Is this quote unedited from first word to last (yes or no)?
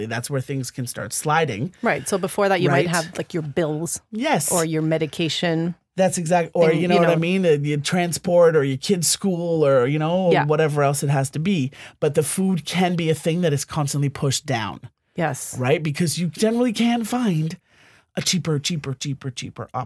yes